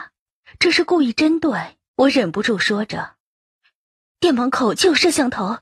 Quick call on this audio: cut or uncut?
cut